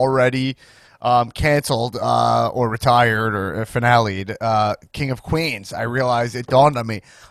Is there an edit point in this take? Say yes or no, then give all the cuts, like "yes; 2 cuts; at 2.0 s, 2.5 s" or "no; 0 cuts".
no; 0 cuts